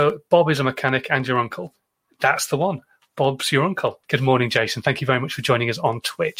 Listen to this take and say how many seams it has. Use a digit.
1